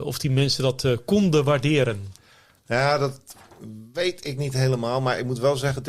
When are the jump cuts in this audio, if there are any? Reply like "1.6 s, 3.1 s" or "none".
none